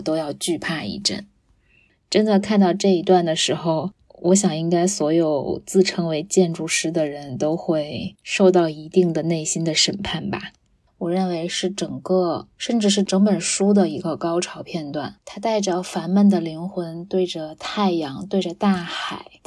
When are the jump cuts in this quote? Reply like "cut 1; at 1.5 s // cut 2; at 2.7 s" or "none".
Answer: cut 1; at 10.9 s